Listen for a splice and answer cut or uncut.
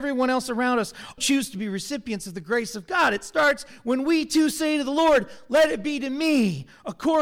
cut